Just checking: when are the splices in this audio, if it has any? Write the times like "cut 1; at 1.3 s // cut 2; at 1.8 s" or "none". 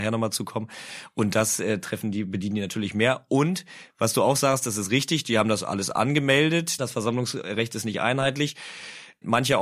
cut 1; at 6.8 s